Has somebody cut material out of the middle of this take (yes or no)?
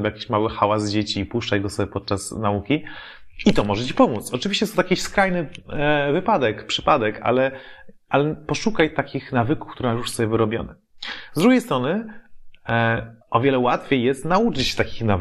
yes